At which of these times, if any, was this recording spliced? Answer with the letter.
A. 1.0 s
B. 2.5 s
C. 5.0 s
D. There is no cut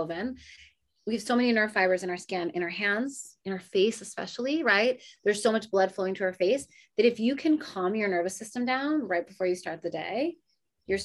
D